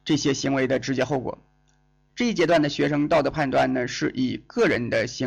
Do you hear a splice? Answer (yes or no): yes